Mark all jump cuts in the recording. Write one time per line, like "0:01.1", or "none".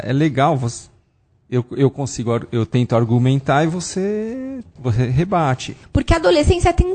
0:04.8
0:05.8